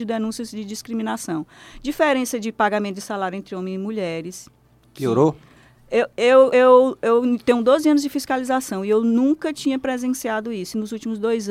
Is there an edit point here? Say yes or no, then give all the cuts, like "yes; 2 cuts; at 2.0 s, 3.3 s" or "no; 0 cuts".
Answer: no; 0 cuts